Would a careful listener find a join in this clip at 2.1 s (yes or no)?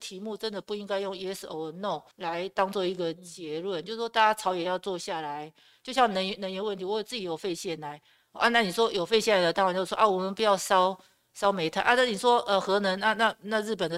yes